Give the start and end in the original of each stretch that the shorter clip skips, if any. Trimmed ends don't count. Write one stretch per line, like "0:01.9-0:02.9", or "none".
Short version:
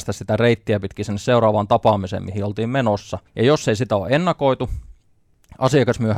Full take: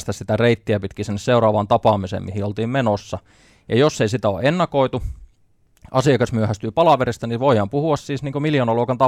0:03.3-0:03.6